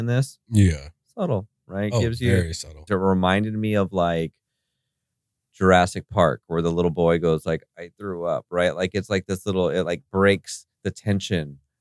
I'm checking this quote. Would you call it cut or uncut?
cut